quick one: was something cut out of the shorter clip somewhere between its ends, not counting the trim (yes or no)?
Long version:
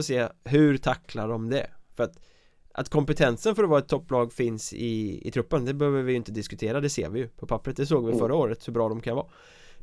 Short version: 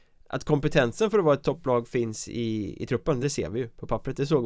yes